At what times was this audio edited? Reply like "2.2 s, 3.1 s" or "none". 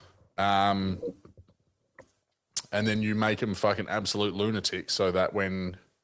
none